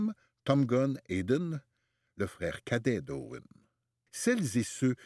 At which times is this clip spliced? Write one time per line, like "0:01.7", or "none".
0:04.1

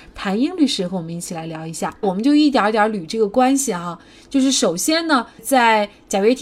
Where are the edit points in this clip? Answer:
0:02.0

